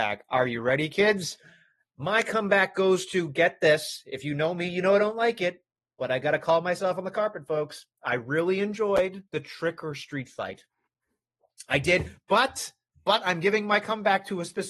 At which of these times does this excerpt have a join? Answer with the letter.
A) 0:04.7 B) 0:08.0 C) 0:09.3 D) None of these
C